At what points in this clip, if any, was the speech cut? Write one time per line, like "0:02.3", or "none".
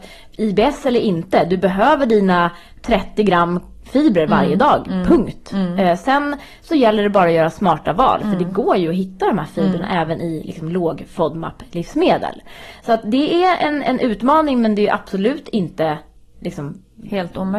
none